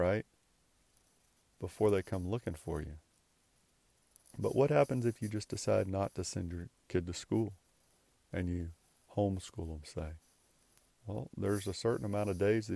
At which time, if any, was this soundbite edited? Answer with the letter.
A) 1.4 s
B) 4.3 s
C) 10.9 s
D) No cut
B